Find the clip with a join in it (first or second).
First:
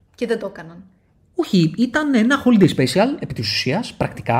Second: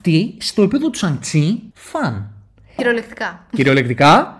second